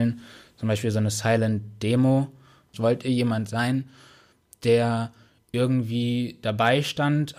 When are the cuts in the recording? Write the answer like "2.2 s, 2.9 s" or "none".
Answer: 2.7 s